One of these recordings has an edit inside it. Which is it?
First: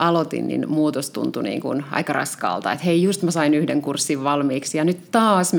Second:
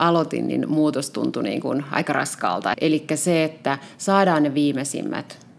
second; 1 cut; at 2.7 s

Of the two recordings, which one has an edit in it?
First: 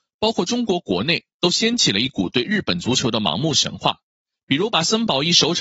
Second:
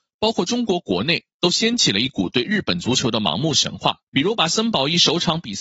second; 1 cut; at 4.1 s

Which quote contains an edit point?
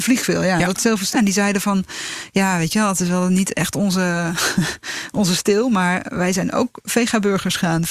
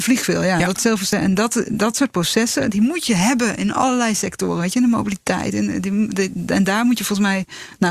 first; 1 cut; at 1.1 s

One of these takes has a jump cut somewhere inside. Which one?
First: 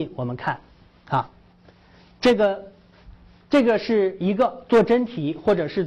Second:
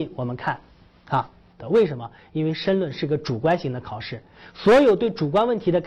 second; 1 cut; at 1.6 s

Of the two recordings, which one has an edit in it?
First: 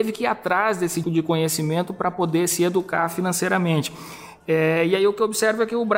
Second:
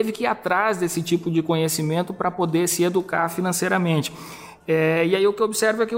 first; 1 cut; at 1.0 s

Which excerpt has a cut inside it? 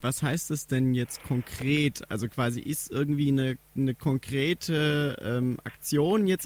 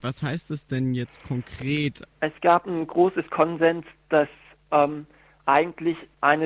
second; 1 cut; at 2.1 s

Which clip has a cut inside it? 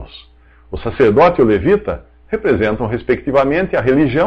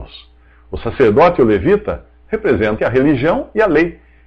second; 1 cut; at 2.8 s

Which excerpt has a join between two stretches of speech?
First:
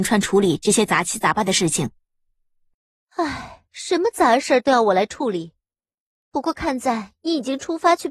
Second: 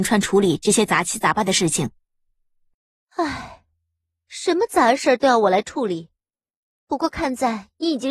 first; 1 cut; at 3.7 s

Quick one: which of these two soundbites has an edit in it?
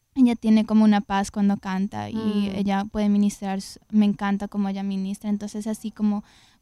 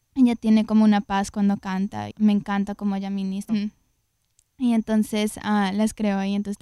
second; 2 cuts; at 2.1 s, 3.5 s

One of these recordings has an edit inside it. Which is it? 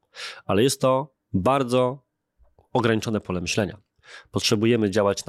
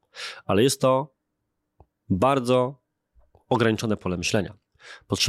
first; 1 cut; at 1.2 s

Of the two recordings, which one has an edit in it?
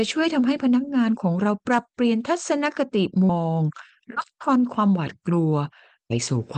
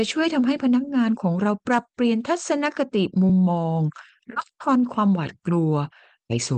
first; 1 cut; at 3.3 s

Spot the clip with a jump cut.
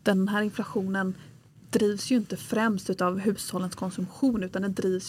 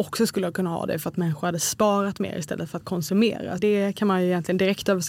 second; 1 cut; at 3.6 s

